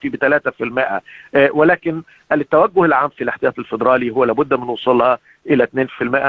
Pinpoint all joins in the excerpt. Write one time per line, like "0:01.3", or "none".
none